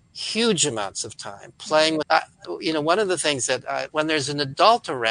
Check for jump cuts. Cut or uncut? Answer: cut